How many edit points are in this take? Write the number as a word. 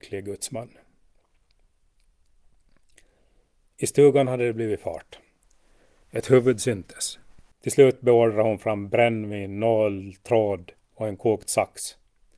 one